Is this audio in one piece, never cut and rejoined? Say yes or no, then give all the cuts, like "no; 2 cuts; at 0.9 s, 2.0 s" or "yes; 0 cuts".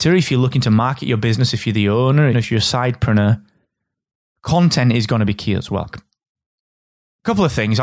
no; 2 cuts; at 2.3 s, 5.9 s